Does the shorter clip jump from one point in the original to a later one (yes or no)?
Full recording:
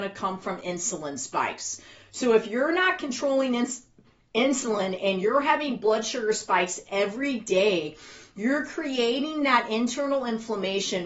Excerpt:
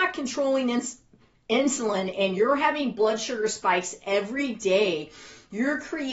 no